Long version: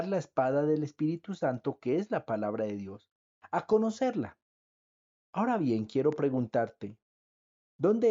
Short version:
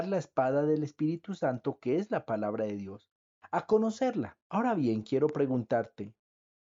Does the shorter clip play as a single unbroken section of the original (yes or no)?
no